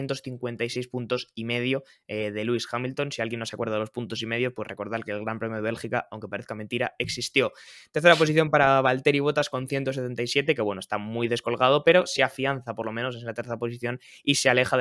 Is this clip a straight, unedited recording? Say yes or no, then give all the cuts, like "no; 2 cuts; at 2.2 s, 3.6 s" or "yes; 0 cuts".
yes; 0 cuts